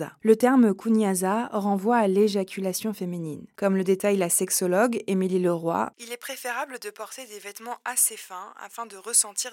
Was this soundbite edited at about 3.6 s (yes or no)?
yes